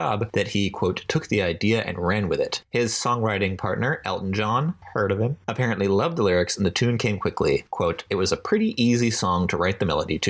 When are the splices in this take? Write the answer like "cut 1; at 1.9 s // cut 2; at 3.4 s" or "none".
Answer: none